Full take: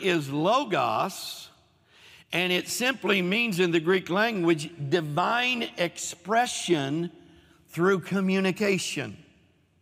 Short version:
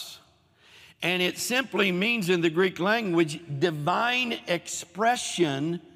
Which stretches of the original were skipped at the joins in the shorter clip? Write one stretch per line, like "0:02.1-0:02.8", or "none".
none

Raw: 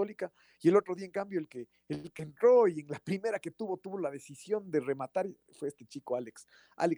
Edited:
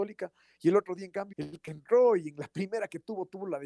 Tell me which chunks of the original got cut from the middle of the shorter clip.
0:01.3-0:01.8

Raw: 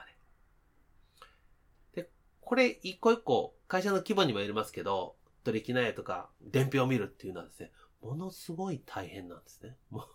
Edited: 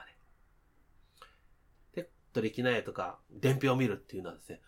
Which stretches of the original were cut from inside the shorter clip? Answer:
0:02.2-0:05.3

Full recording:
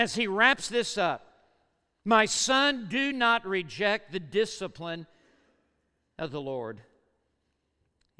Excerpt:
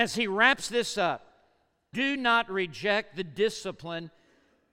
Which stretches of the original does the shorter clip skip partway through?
0:01.9-0:02.9

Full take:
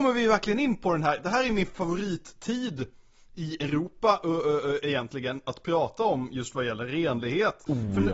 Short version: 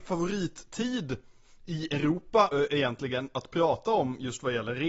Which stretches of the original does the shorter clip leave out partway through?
0:04.2-0:04.6

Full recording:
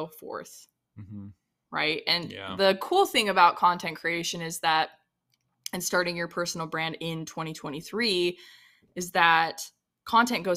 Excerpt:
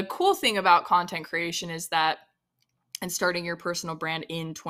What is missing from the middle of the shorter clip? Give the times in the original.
none

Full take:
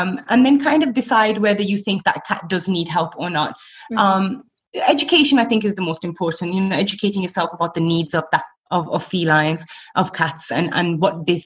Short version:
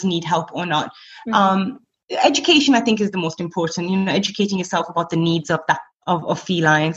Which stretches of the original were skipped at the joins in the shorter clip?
none

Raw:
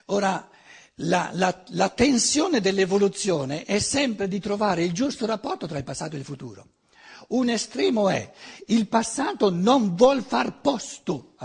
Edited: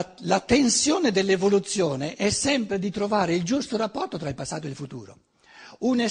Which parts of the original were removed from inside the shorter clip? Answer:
none

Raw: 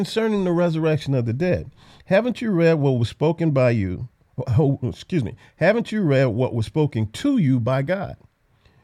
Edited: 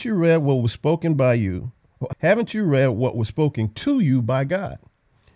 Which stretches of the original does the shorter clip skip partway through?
0:04.5-0:05.5

